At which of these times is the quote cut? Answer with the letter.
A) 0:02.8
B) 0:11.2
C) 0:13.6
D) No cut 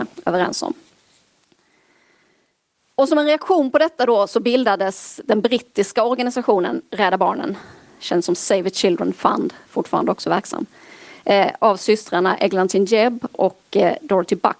D